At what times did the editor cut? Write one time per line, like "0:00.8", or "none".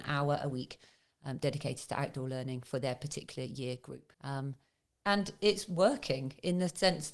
0:04.1